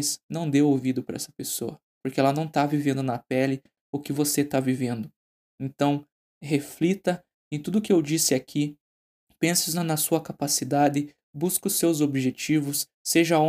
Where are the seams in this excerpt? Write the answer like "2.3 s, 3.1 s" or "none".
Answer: 6.3 s

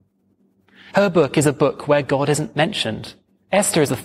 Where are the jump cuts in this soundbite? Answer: 0.9 s

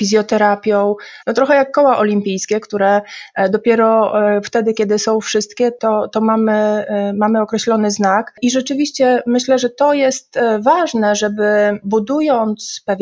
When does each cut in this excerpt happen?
1.2 s

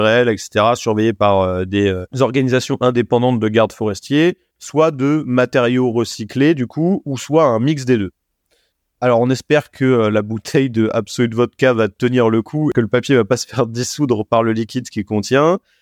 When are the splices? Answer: none

